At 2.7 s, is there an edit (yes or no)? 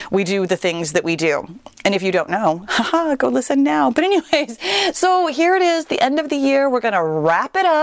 no